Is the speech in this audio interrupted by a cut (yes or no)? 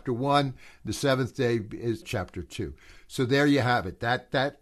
yes